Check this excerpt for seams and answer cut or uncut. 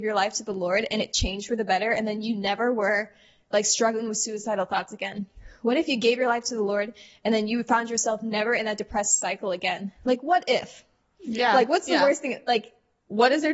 uncut